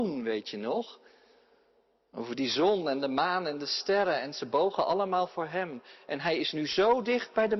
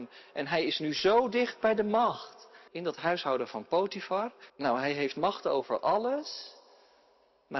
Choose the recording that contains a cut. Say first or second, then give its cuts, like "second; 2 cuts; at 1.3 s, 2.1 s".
second; 2 cuts; at 2.7 s, 4.5 s